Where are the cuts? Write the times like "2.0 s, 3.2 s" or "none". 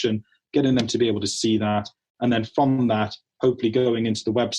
none